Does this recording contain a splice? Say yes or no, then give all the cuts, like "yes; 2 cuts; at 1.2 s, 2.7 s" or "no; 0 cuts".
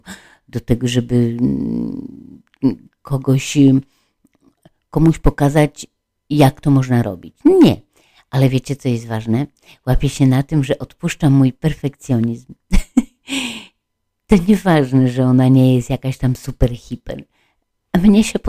no; 0 cuts